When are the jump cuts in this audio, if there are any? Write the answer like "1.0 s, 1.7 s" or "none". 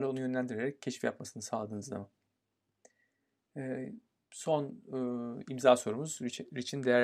none